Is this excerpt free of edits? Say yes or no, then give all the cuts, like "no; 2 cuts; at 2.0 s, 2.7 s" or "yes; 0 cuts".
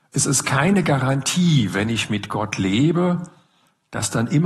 yes; 0 cuts